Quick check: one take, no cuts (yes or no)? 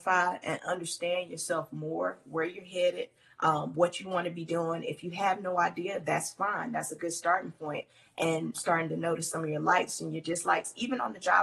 no